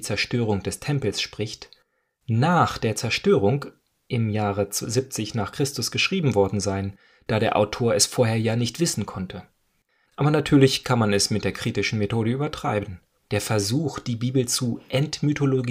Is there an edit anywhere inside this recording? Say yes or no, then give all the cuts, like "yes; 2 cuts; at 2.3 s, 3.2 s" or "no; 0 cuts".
yes; 2 cuts; at 10.1 s, 13.3 s